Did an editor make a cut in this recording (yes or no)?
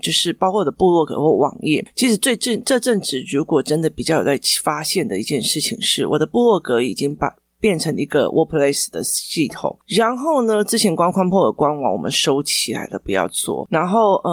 no